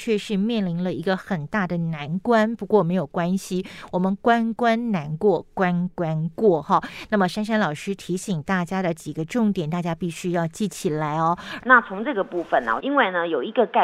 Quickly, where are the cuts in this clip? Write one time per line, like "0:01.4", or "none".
0:11.6
0:12.8